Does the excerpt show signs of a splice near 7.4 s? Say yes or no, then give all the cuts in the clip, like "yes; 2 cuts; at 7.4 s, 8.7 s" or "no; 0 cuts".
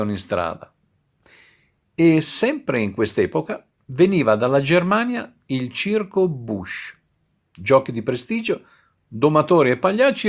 yes; 1 cut; at 7.4 s